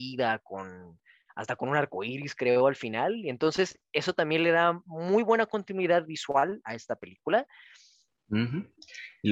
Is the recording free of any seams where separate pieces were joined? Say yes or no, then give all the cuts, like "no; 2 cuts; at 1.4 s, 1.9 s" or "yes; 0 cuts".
no; 1 cut; at 8.2 s